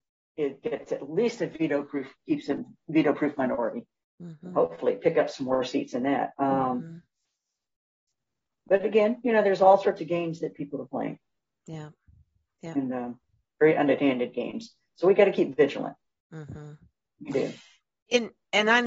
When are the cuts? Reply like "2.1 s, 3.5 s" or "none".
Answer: none